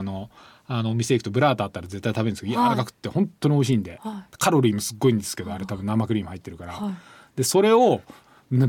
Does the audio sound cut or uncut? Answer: uncut